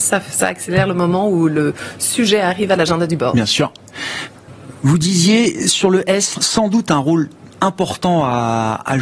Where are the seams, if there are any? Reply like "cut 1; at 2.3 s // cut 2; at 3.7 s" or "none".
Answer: cut 1; at 6.3 s